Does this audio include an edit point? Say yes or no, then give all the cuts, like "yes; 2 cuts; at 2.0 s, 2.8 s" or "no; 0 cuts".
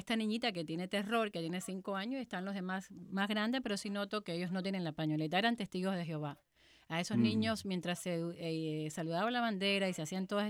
no; 0 cuts